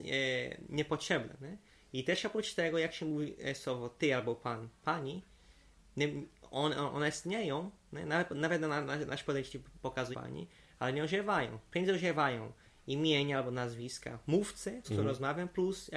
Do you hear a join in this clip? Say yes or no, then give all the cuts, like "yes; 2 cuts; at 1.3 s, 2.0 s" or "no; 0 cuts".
yes; 2 cuts; at 10.1 s, 14.8 s